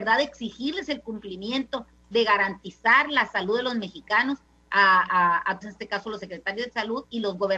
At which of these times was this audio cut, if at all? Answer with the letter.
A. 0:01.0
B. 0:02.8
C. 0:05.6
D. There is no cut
C